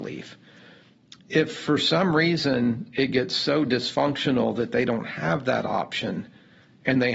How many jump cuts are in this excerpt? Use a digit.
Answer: 0